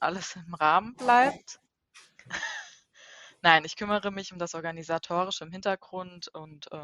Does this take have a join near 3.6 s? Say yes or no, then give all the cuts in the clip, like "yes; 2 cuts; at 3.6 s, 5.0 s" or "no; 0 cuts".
no; 1 cut; at 2.2 s